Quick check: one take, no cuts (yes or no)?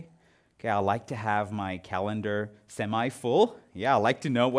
yes